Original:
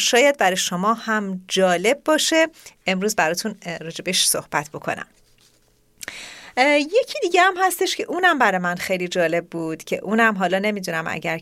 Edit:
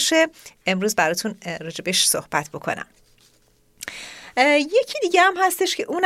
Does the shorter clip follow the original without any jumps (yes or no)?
yes